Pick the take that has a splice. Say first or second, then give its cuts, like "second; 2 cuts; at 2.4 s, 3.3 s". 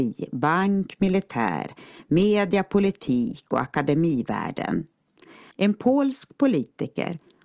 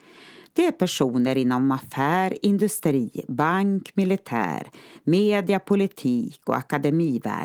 first; 1 cut; at 5.5 s